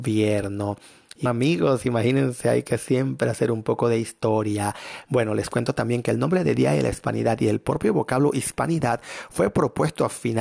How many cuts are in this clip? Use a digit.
2